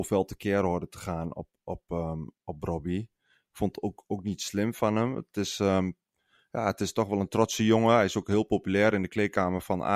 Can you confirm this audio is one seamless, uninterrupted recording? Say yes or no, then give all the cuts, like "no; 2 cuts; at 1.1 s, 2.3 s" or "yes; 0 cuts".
yes; 0 cuts